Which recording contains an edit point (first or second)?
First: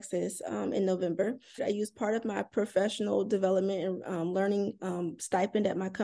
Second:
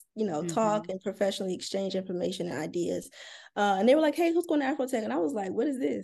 first